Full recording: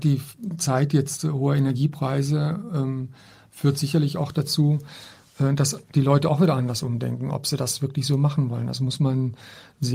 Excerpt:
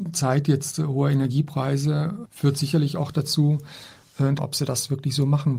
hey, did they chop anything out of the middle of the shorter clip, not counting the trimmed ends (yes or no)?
yes